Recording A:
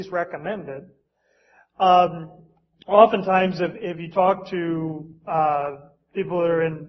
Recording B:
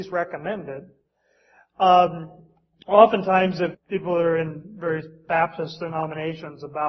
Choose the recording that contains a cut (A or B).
B